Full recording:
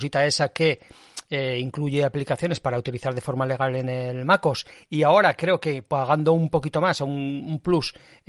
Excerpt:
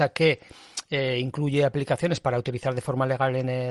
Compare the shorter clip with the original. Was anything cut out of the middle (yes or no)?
no